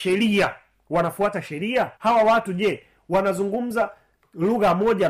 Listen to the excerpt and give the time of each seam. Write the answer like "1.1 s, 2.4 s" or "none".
2.0 s